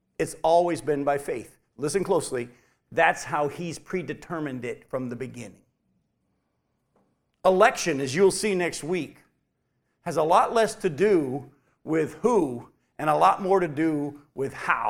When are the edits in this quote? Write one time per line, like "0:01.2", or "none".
none